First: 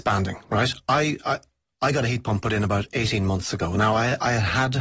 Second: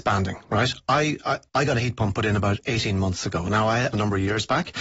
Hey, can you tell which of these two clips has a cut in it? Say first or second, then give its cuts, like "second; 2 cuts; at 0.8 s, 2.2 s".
second; 2 cuts; at 1.5 s, 3.9 s